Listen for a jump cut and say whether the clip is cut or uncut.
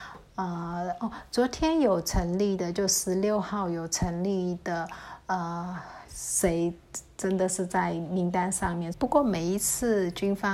cut